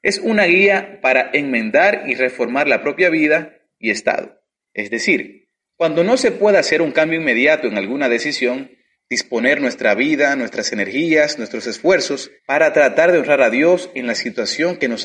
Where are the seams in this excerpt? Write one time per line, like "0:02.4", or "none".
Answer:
0:04.5
0:08.9
0:12.4